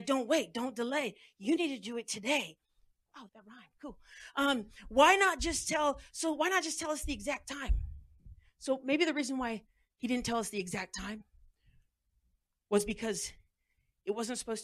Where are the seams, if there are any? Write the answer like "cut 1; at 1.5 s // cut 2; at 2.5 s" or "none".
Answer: cut 1; at 3.3 s